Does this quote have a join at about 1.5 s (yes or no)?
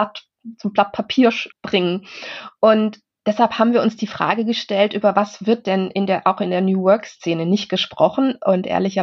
yes